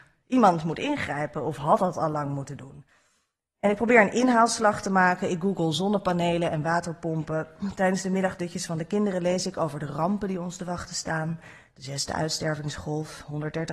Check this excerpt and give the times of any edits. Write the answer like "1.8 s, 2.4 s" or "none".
none